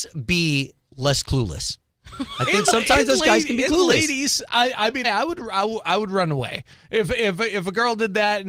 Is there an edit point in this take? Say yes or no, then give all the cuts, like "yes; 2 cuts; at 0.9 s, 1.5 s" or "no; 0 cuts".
yes; 1 cut; at 5.0 s